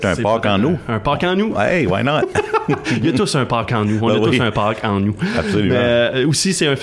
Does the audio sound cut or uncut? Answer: uncut